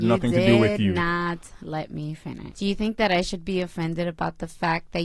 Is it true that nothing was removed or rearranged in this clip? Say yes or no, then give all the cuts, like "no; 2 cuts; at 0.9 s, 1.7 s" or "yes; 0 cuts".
no; 1 cut; at 2.5 s